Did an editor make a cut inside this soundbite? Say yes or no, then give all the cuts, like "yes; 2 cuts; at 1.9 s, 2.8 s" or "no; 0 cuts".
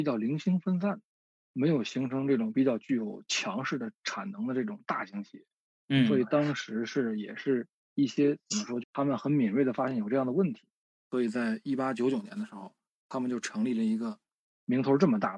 yes; 1 cut; at 8.8 s